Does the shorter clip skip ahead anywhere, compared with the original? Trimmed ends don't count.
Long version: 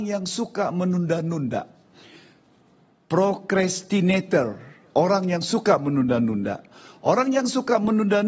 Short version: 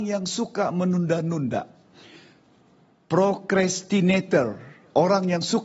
no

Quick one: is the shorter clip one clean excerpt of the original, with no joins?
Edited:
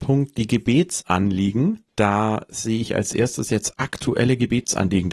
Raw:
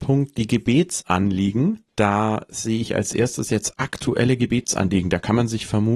yes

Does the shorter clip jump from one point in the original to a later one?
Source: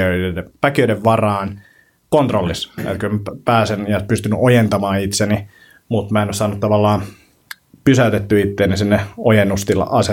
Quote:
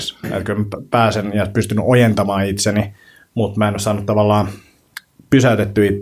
no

